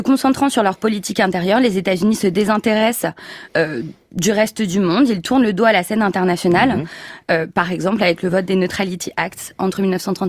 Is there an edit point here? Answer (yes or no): no